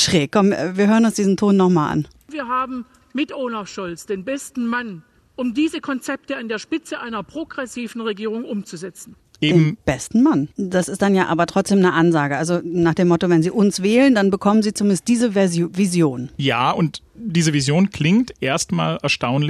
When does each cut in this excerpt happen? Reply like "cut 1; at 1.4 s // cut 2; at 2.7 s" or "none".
cut 1; at 10.5 s